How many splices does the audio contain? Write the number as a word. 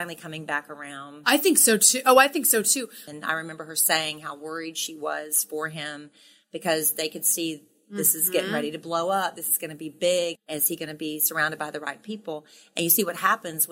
two